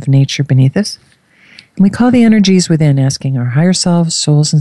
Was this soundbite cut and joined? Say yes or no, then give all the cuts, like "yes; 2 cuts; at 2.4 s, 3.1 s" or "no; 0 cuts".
no; 0 cuts